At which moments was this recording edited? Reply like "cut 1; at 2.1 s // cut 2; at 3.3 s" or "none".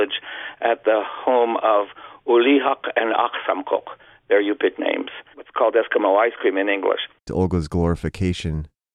cut 1; at 5.3 s // cut 2; at 7.3 s